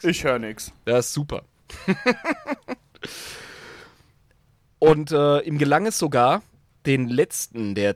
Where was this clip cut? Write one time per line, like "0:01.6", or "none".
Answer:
none